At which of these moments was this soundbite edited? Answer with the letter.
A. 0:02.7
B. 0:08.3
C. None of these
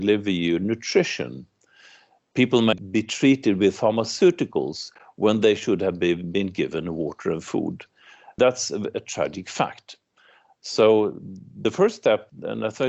A